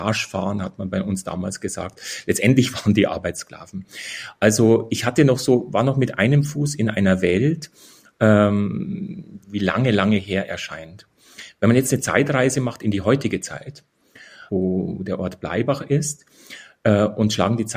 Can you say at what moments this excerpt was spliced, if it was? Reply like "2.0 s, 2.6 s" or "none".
9.4 s, 14.5 s